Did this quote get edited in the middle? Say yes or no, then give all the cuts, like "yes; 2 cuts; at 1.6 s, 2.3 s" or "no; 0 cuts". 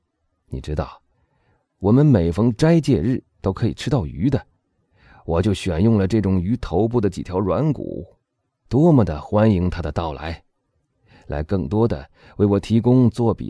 yes; 1 cut; at 8.7 s